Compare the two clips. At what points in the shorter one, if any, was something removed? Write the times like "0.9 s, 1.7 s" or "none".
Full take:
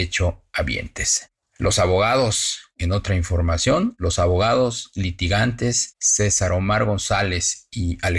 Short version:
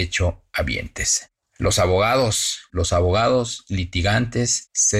2.7 s